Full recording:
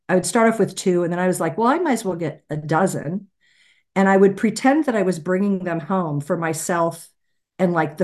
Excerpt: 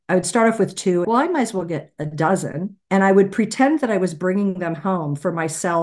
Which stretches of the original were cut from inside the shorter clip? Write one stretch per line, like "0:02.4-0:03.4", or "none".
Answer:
0:01.0-0:01.6
0:03.3-0:03.9